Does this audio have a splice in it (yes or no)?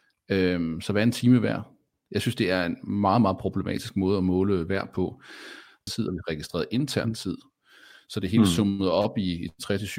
yes